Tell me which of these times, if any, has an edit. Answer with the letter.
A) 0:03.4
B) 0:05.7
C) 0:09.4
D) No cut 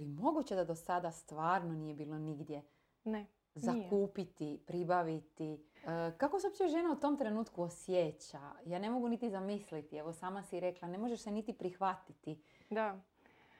B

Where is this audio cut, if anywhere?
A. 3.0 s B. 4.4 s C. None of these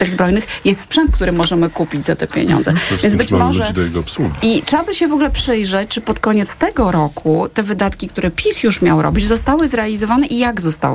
C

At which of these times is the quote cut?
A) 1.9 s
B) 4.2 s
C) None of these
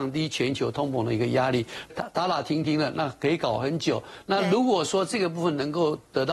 A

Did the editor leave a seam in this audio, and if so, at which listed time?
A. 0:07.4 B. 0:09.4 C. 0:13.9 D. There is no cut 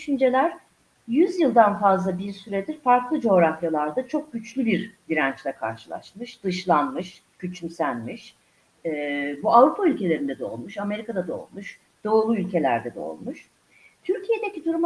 A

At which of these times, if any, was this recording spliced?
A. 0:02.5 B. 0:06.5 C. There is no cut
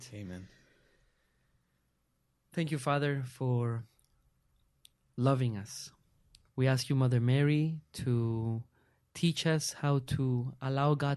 B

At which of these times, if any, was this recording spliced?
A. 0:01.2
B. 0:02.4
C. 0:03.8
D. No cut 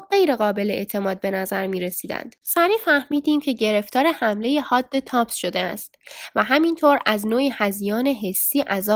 B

